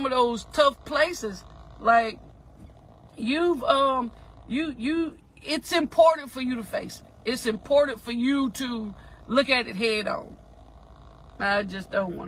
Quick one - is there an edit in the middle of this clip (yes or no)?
yes